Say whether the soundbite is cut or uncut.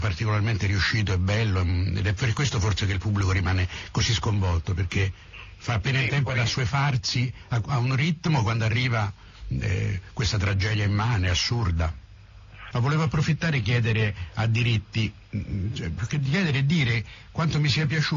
cut